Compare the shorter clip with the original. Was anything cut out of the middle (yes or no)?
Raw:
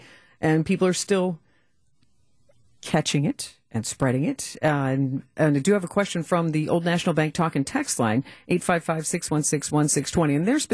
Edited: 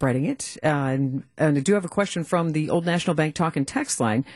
no